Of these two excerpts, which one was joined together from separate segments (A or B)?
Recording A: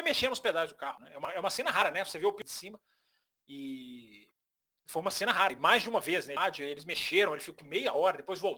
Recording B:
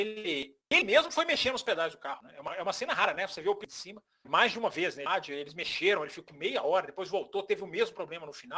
B